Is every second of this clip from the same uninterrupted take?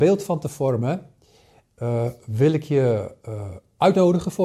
yes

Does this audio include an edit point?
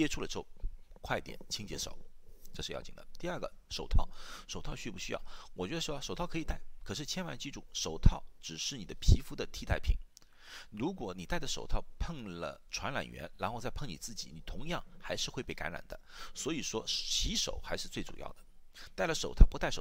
no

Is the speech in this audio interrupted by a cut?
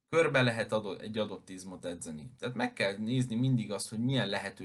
no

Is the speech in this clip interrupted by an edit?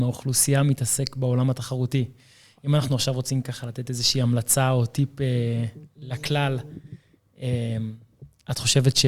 no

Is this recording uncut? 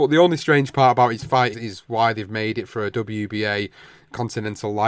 no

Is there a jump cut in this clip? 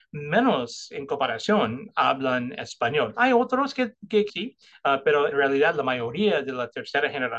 yes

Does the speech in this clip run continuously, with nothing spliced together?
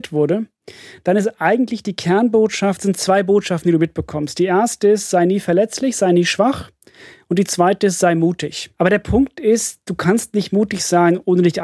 no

